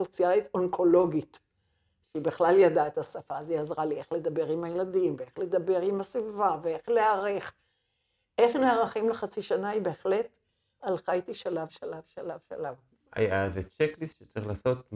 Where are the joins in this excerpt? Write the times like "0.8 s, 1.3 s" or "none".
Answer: none